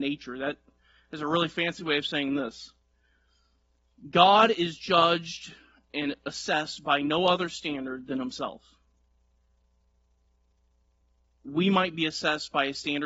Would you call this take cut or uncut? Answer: uncut